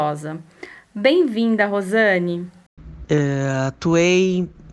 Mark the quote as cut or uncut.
cut